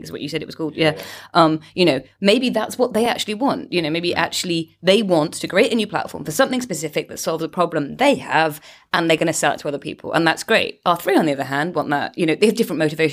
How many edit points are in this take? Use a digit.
0